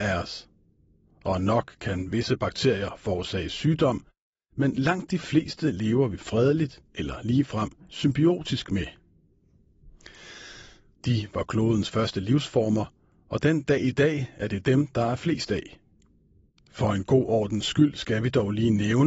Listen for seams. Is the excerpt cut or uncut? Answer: cut